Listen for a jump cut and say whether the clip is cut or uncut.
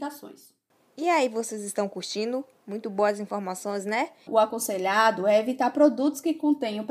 cut